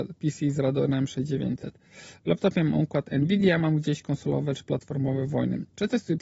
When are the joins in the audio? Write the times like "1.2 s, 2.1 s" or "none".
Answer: none